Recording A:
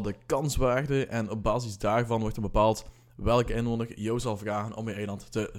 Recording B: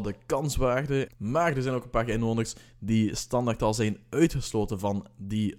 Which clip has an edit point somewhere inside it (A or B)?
B